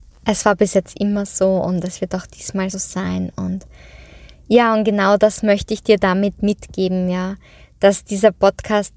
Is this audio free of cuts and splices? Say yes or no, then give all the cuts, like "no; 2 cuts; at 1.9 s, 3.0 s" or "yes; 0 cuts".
no; 1 cut; at 2.7 s